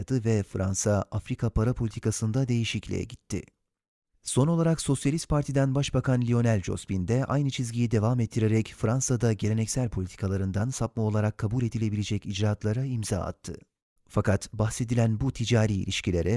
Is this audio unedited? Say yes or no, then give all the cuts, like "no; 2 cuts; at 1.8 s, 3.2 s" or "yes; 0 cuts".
no; 1 cut; at 14.0 s